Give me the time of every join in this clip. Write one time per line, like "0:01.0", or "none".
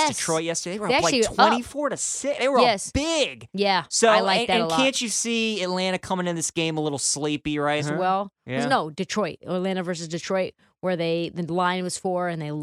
0:07.8